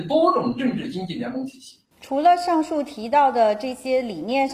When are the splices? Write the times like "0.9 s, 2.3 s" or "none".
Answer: 1.9 s